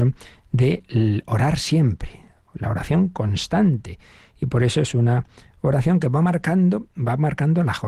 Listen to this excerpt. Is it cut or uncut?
uncut